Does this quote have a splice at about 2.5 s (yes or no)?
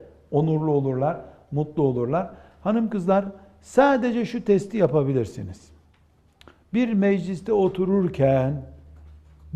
no